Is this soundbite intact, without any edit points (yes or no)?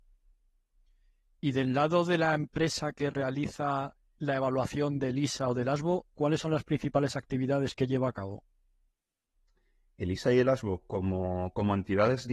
yes